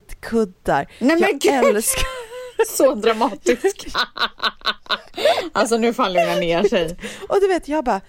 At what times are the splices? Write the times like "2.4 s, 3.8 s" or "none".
3.9 s

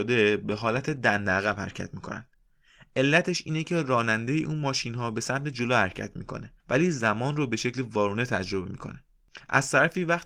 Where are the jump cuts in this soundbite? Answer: 6.6 s

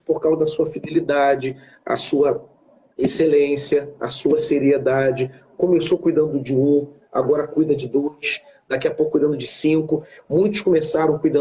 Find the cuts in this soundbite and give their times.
none

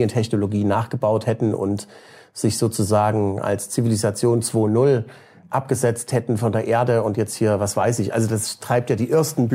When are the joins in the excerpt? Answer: none

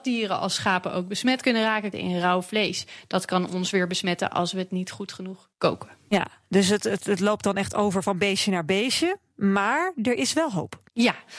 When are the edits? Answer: 1.9 s

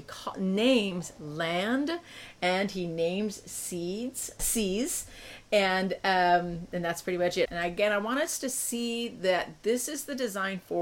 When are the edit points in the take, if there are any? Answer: 4.4 s, 7.5 s

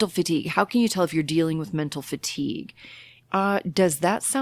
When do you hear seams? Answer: 3.2 s

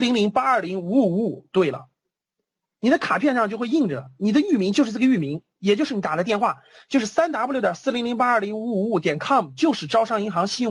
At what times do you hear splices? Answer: none

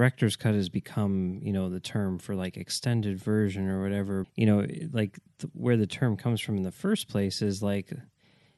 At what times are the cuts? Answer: 4.2 s

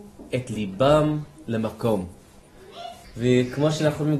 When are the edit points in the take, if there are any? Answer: 3.0 s

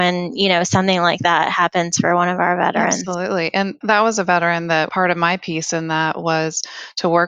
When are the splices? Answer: 3.8 s

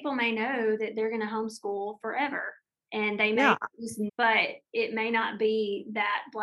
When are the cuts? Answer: 4.1 s

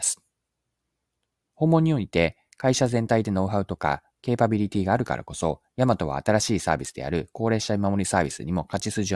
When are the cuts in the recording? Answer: none

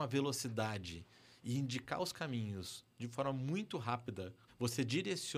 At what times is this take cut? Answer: 4.5 s

